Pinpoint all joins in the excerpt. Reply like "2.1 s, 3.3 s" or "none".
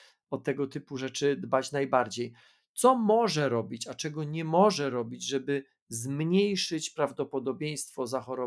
none

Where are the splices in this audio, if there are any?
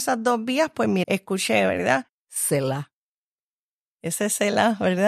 1.0 s, 2.1 s

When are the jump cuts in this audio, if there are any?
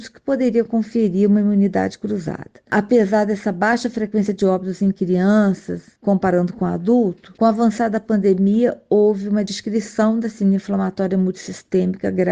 none

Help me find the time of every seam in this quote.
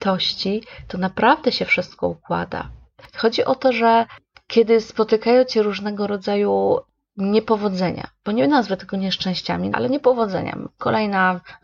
9.7 s

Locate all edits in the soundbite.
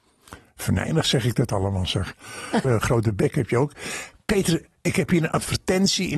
2.6 s

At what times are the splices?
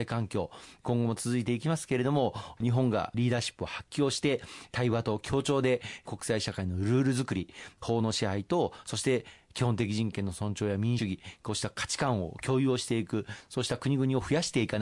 11.0 s

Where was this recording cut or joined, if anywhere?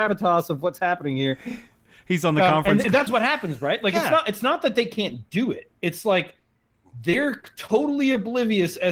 3.1 s

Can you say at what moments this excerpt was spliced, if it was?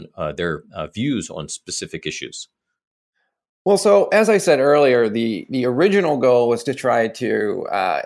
none

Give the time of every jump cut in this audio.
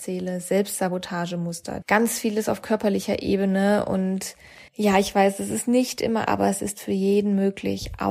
1.8 s, 4.7 s, 6.3 s

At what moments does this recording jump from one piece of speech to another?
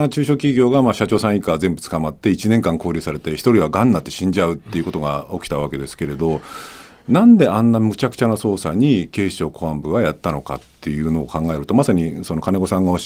none

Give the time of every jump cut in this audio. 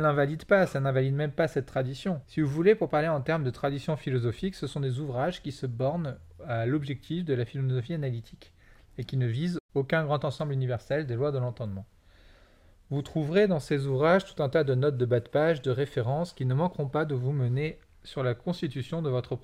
2.2 s

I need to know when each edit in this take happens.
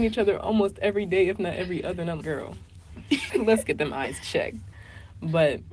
2.2 s, 3.3 s

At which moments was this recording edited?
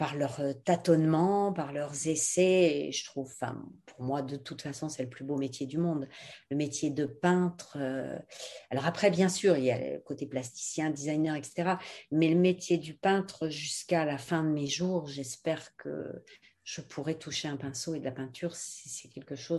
none

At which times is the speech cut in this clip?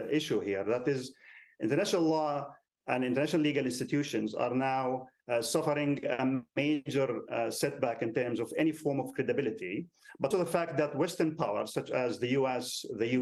10.3 s

